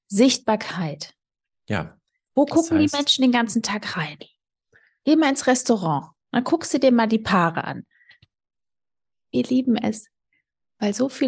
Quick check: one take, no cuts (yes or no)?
yes